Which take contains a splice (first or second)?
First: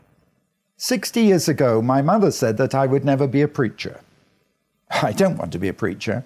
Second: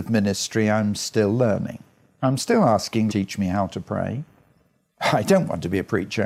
second